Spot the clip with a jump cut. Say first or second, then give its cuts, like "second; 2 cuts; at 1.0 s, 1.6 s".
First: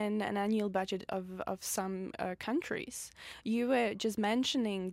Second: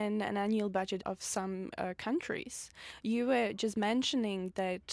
second; 1 cut; at 1.0 s